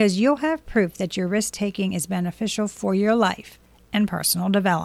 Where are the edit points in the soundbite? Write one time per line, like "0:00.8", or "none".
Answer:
none